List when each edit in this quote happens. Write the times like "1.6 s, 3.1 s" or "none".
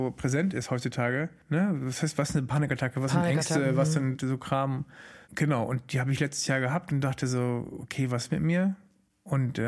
5.2 s